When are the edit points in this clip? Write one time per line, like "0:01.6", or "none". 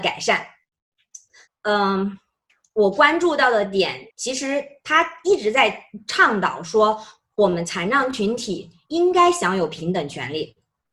0:01.5
0:04.1